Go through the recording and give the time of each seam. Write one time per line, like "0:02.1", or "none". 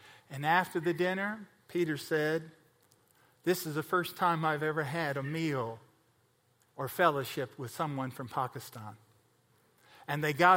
none